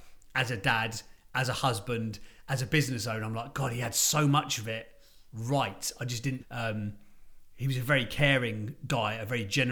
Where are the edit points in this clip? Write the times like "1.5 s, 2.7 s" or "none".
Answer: 6.4 s